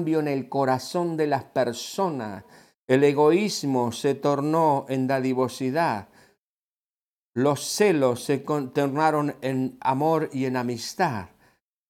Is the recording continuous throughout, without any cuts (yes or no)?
yes